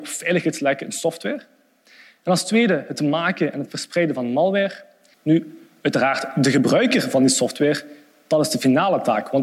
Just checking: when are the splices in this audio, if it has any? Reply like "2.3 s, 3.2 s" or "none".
5.1 s